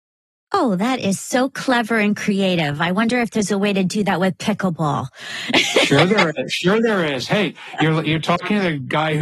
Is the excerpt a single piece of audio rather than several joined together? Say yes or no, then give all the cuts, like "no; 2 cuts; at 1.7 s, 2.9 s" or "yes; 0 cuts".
yes; 0 cuts